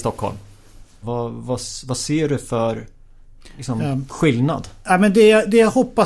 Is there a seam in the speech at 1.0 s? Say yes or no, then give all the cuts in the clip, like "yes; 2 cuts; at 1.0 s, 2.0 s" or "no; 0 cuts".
yes; 1 cut; at 1.0 s